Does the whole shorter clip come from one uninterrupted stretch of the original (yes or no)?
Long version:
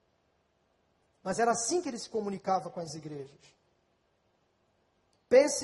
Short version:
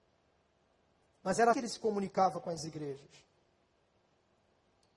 no